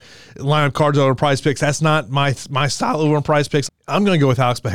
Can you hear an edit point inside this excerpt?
yes; 1 cut; at 3.7 s

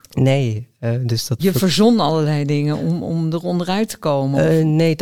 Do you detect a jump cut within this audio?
yes; 1 cut; at 1.4 s

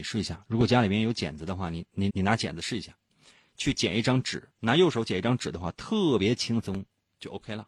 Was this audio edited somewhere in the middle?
yes; 1 cut; at 2.1 s

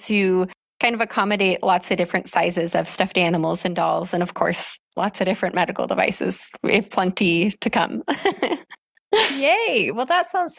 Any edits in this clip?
no; 0 cuts

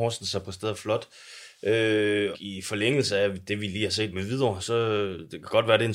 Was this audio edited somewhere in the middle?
yes; 2 cuts; at 2.3 s, 4.6 s

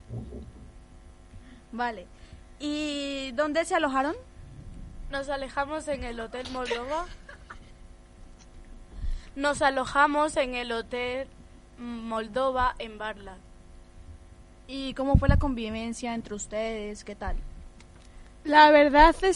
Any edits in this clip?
no; 0 cuts

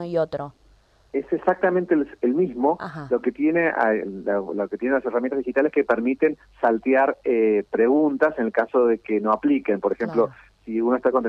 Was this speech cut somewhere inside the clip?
no; 0 cuts

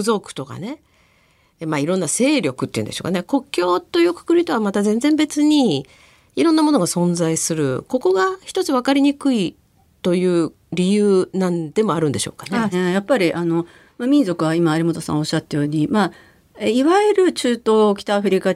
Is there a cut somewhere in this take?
yes; 1 cut; at 12.7 s

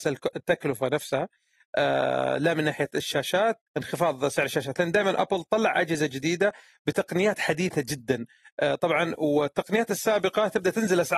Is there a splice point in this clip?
yes; 1 cut; at 3.7 s

